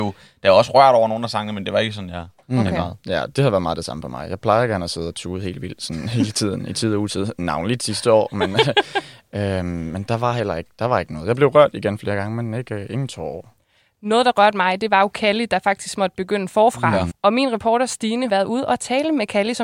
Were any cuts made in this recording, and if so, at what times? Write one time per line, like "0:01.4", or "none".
0:17.1
0:18.3